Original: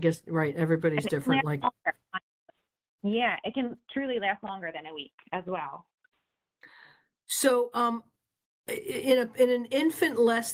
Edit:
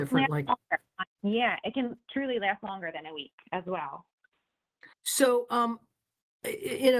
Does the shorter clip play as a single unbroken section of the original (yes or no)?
no